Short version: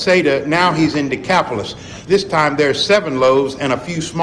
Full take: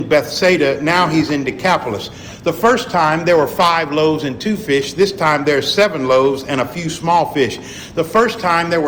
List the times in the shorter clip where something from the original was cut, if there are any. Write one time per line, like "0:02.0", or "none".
0:02.1